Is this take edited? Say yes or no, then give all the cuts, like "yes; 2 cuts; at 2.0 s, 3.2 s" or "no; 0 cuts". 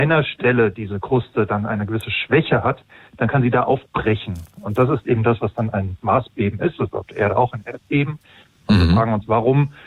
yes; 1 cut; at 8.6 s